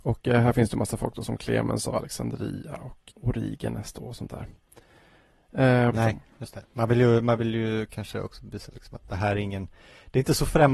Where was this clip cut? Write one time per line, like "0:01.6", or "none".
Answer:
0:03.1
0:05.9